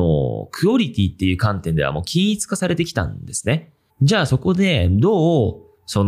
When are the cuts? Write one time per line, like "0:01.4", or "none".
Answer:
0:03.9